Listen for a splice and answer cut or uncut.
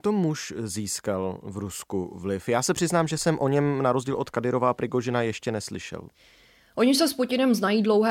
uncut